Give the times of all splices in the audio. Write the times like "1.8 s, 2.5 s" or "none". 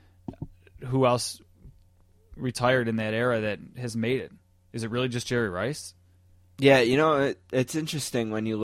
none